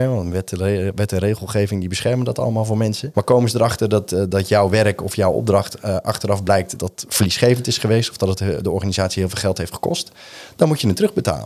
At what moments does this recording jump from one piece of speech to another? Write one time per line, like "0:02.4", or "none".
0:03.1
0:06.8

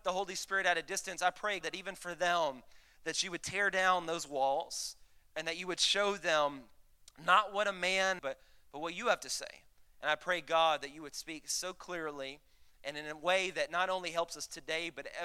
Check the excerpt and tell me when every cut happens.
0:01.6
0:08.2

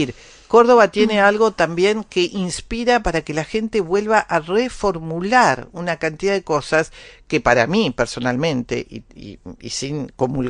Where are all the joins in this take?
none

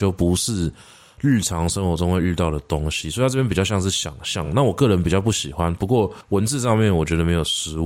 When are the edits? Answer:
none

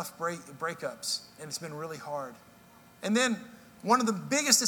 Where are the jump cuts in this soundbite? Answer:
0:01.4
0:02.9

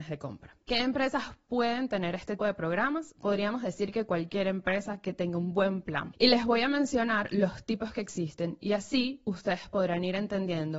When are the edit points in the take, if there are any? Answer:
0:02.4

